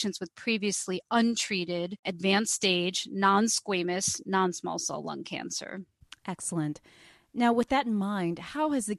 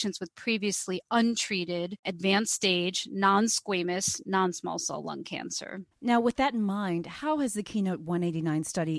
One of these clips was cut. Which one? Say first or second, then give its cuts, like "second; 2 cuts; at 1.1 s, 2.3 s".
second; 1 cut; at 5.9 s